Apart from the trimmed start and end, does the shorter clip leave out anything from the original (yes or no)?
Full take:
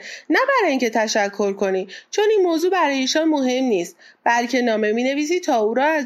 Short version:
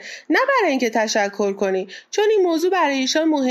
no